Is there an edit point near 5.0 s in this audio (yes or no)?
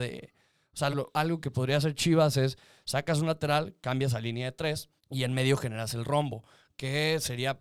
yes